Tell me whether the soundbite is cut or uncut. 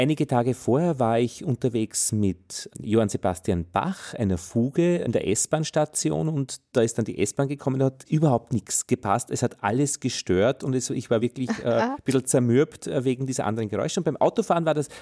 uncut